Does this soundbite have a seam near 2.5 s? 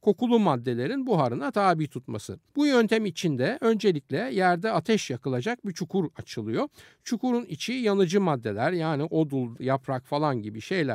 yes; 2 cuts; at 2.5 s, 9.6 s

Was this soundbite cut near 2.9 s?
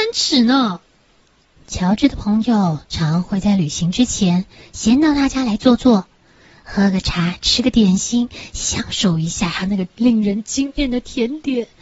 yes; 1 cut; at 2.9 s

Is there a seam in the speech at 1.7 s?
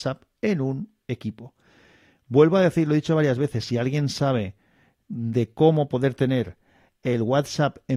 no; 0 cuts

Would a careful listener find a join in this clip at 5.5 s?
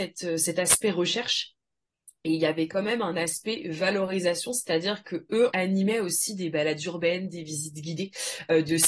yes; 1 cut; at 5.5 s

